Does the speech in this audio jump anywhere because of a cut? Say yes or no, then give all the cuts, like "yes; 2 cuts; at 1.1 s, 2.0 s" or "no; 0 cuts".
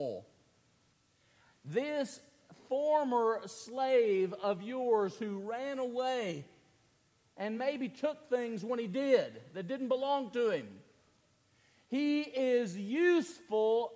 no; 0 cuts